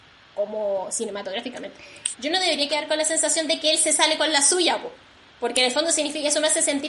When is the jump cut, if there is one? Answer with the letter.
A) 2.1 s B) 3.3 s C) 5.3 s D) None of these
A